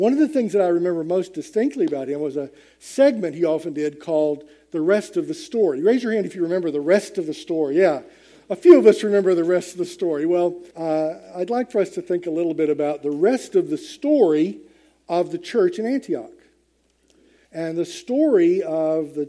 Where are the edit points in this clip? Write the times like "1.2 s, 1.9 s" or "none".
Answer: 10.7 s, 17.4 s